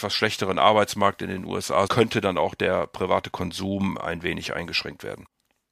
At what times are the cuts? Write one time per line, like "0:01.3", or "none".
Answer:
0:01.9